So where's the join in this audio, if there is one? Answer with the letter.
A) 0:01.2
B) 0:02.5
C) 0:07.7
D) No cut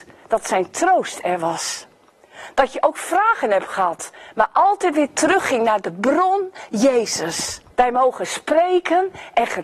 C